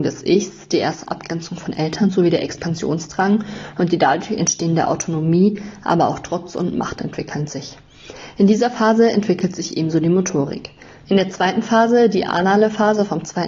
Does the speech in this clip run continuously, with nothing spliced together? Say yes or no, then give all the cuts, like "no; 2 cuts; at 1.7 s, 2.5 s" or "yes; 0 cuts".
no; 1 cut; at 11.1 s